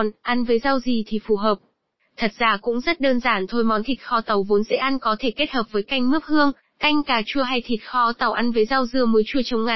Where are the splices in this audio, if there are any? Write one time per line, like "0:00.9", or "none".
none